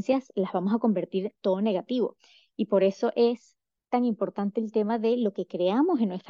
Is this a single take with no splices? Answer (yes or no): yes